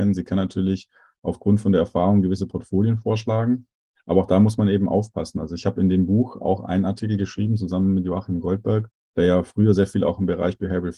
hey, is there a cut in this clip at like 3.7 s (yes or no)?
no